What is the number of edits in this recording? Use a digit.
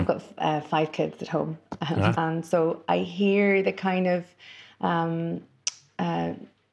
1